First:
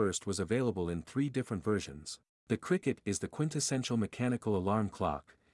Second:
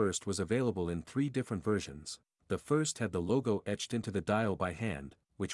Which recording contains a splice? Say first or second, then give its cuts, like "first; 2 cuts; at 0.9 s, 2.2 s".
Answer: first; 1 cut; at 2.3 s